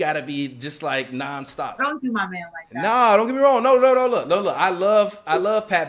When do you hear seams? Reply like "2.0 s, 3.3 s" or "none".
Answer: 1.8 s

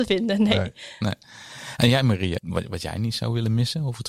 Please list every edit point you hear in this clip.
2.4 s

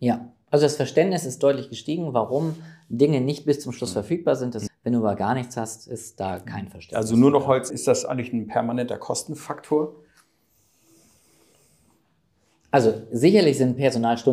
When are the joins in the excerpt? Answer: 4.7 s, 7.7 s

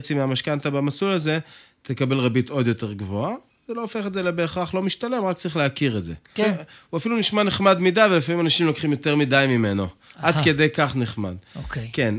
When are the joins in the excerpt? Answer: 6.4 s

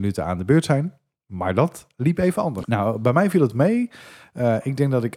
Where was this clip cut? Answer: 2.6 s

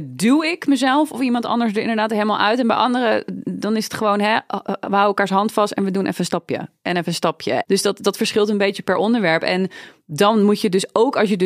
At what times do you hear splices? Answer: none

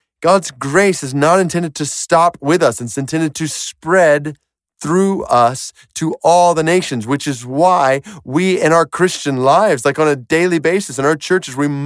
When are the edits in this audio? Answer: none

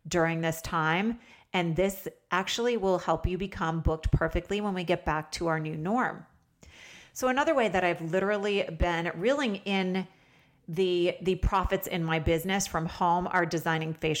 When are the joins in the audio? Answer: none

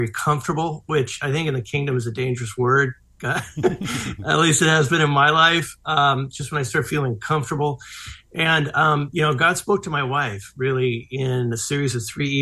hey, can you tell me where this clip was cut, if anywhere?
none

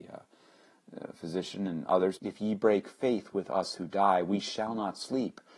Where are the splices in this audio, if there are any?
2.2 s

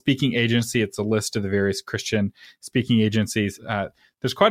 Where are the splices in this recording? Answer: 3.6 s

